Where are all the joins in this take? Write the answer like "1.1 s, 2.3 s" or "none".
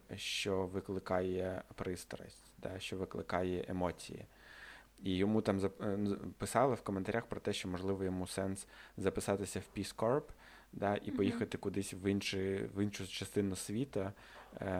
none

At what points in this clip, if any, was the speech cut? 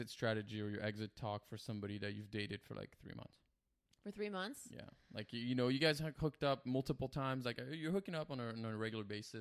none

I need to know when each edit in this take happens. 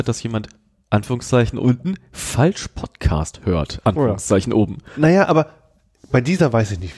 none

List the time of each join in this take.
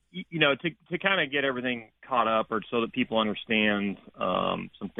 2.0 s

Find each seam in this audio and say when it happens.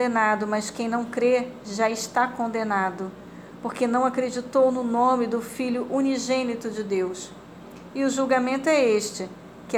none

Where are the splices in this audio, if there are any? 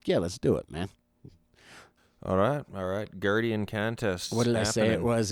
none

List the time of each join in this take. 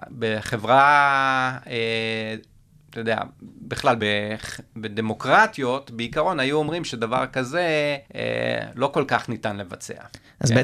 4.0 s, 8.0 s

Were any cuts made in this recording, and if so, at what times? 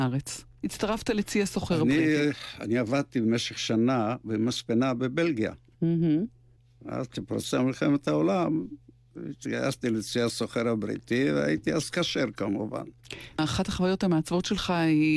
none

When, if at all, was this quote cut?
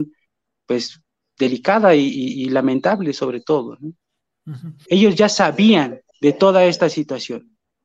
4.9 s, 6.1 s

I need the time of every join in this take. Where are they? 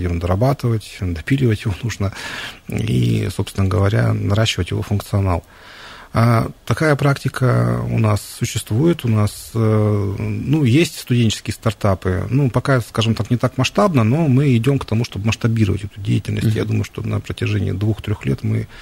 none

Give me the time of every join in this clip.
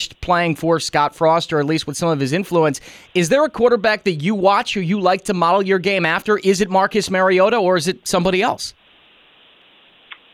none

